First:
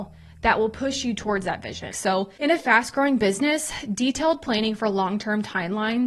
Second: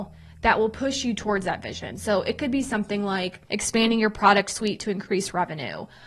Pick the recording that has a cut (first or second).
first